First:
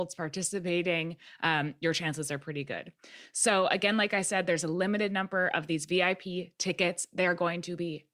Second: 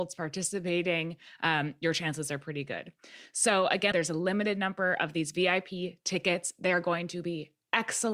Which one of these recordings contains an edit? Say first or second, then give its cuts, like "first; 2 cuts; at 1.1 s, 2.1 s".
second; 1 cut; at 3.9 s